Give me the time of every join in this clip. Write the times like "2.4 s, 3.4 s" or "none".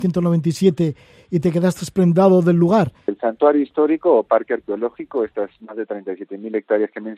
3.1 s